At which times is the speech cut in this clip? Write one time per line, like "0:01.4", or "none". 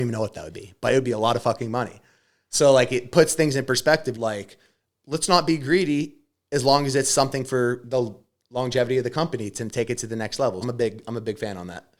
0:04.1
0:10.6